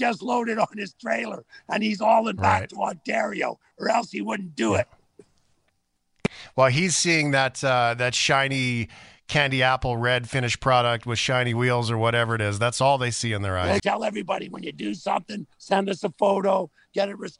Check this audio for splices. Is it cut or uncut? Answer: cut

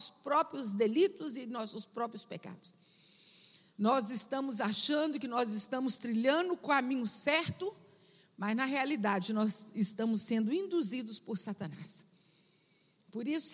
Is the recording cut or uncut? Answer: uncut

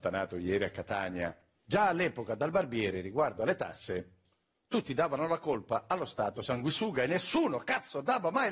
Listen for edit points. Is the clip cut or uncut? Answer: cut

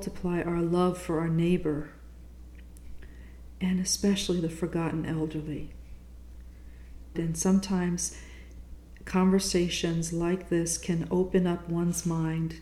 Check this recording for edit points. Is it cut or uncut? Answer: cut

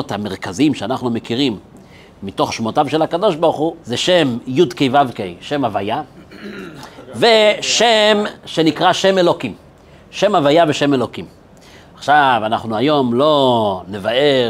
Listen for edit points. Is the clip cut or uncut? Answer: cut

